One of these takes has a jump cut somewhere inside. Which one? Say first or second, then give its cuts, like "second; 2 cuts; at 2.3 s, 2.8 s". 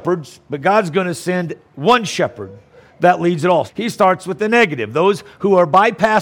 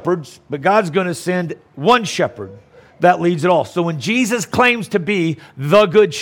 first; 1 cut; at 3.7 s